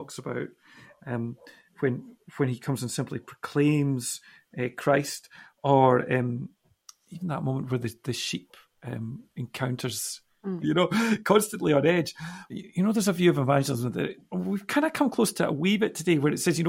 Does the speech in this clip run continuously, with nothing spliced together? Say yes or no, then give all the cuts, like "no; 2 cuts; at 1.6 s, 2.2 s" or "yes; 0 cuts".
no; 2 cuts; at 10.6 s, 12.5 s